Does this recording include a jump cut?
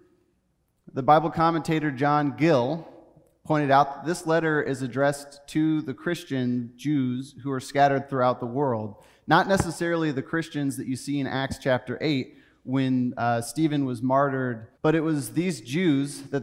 yes; 1 cut; at 14.8 s

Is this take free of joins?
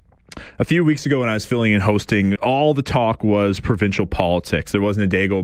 no; 1 cut; at 2.4 s

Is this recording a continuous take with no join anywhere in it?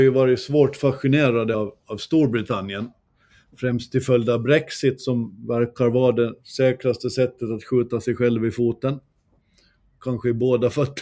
yes; 0 cuts

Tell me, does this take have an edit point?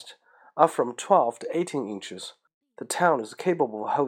no; 0 cuts

